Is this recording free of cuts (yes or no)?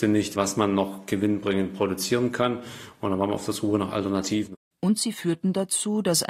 no